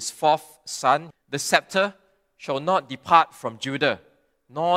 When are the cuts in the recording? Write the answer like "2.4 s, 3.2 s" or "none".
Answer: 1.1 s